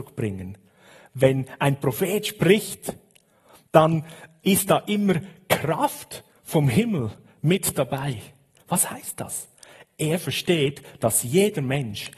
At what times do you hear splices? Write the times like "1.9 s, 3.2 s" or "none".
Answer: 8.6 s

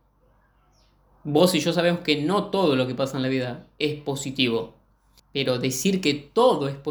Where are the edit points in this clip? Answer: 5.2 s

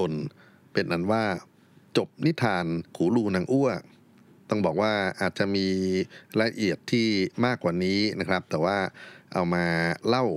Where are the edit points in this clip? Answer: 2.9 s

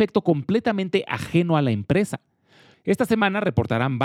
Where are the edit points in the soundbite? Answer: 2.7 s

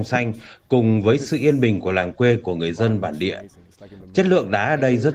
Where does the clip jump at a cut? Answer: none

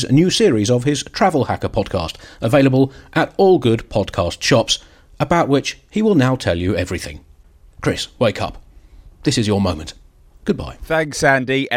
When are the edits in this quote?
10.3 s

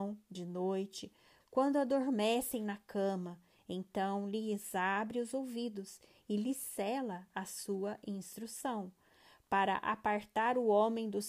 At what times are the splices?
1.4 s

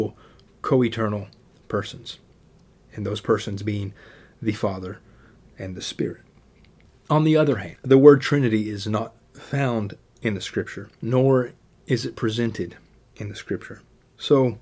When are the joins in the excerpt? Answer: 5.4 s, 11.0 s

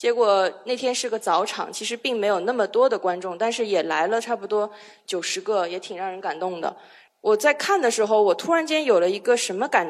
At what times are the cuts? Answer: none

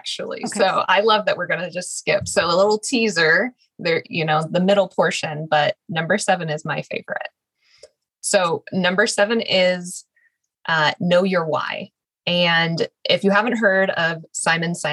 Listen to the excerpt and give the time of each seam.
none

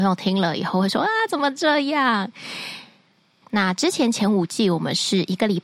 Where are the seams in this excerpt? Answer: 3.4 s

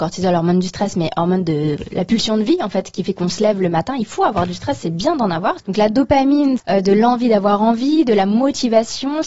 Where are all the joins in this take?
5.6 s, 6.6 s

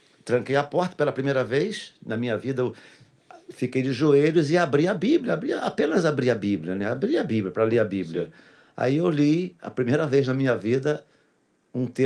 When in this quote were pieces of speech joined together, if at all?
none

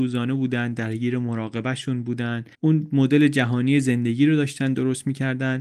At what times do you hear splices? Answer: 2.5 s

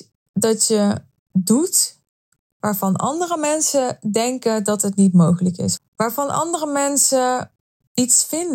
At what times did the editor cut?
5.8 s

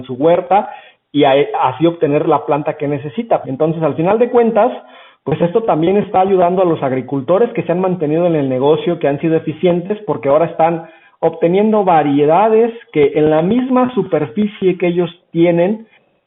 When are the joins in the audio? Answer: 3.4 s

